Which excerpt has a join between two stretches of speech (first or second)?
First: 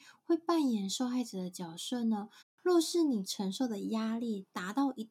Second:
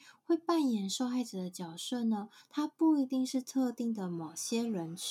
first